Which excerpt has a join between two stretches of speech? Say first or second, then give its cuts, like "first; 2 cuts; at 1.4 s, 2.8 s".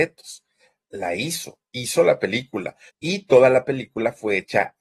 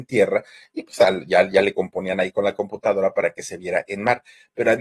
first; 1 cut; at 2.9 s